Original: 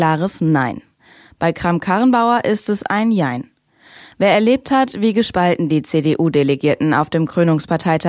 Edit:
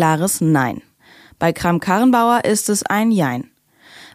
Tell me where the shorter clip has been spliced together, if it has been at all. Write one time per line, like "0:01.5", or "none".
none